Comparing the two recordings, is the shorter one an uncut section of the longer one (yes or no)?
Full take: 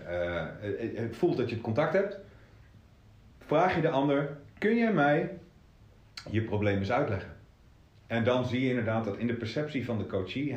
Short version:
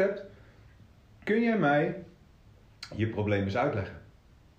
no